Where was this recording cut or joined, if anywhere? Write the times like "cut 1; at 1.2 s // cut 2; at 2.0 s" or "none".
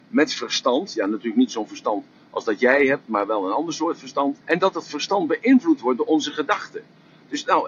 cut 1; at 4.4 s

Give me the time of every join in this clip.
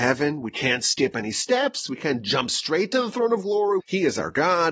cut 1; at 3.8 s

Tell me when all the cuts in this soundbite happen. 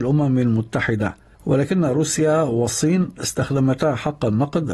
cut 1; at 1.3 s

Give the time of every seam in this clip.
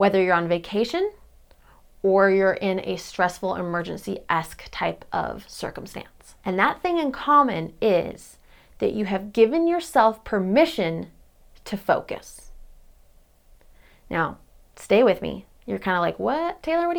cut 1; at 6.4 s

